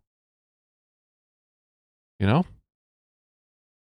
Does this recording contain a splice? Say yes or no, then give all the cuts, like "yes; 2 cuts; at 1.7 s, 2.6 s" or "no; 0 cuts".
yes; 1 cut; at 2.1 s